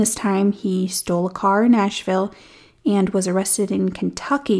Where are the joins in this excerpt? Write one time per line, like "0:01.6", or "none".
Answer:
none